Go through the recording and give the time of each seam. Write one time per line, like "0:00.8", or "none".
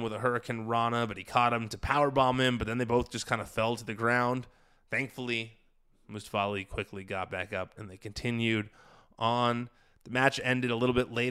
0:07.8